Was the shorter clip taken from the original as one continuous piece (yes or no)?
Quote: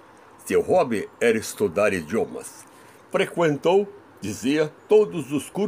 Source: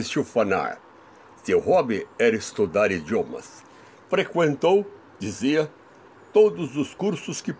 no